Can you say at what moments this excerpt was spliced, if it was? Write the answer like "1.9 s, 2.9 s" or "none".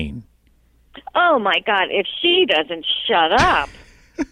none